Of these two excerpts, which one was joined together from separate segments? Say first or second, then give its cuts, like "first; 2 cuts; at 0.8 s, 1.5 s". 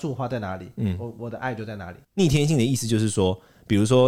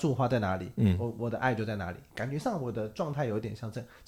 first; 1 cut; at 2.0 s